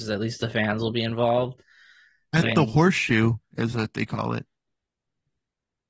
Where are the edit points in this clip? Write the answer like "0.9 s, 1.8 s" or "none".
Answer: none